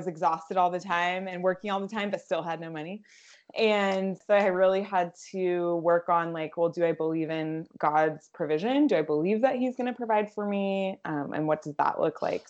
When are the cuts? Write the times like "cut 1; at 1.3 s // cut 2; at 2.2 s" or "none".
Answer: none